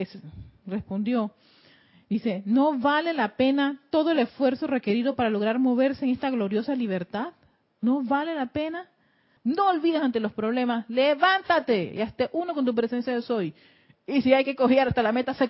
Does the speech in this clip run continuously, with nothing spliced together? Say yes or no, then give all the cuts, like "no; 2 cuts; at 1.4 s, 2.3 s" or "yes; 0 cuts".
no; 1 cut; at 9.4 s